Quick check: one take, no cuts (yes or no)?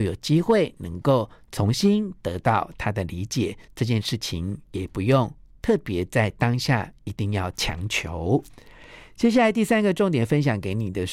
yes